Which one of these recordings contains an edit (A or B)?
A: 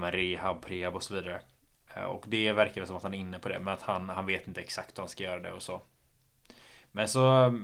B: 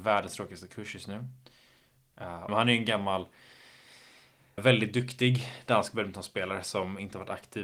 B